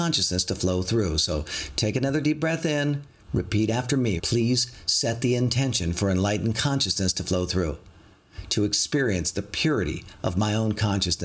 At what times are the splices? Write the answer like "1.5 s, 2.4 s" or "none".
4.2 s